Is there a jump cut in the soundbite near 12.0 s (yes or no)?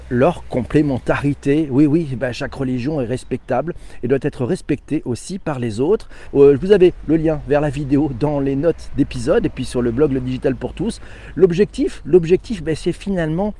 no